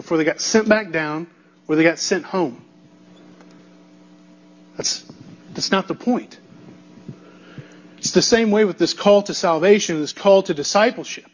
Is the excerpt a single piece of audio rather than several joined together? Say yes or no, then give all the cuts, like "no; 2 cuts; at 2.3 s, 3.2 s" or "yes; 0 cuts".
yes; 0 cuts